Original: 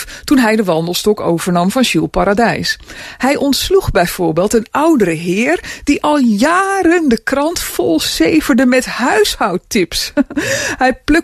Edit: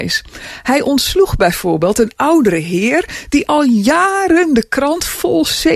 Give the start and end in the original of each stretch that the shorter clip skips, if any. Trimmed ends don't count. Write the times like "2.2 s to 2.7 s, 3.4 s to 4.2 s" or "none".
none